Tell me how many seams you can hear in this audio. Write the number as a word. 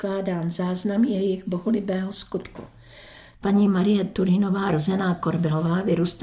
one